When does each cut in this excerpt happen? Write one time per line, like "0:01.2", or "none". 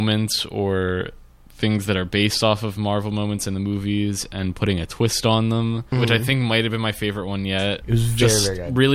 0:05.9
0:07.8